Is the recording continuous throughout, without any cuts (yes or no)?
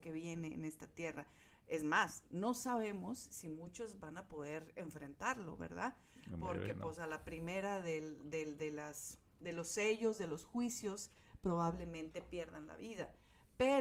yes